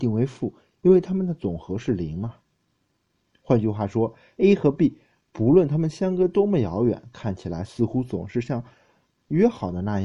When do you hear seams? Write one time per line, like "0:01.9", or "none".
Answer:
none